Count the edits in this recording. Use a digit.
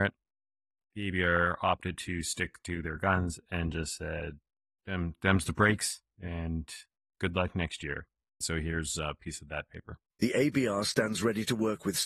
2